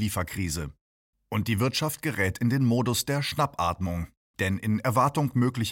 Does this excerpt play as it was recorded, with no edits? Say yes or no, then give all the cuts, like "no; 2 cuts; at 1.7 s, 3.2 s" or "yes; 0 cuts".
no; 2 cuts; at 1.1 s, 4.3 s